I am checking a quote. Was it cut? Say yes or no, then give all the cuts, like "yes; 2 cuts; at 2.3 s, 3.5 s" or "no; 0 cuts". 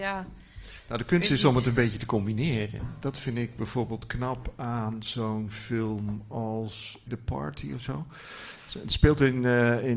yes; 1 cut; at 7.1 s